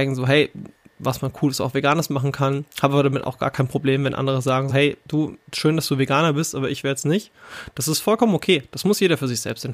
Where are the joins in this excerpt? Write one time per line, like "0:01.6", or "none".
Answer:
0:04.7